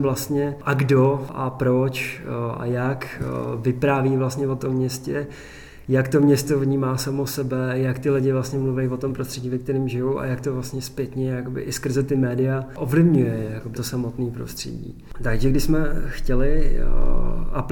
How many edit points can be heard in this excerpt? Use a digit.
1